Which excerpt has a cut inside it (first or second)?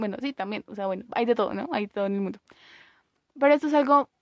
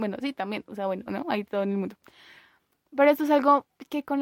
second